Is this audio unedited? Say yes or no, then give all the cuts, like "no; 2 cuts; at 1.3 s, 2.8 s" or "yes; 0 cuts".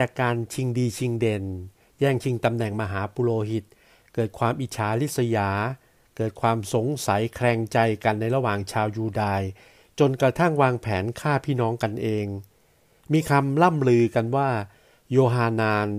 yes; 0 cuts